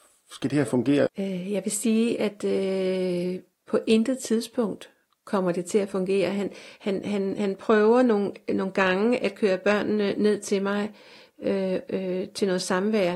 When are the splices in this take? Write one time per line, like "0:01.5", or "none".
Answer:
0:01.1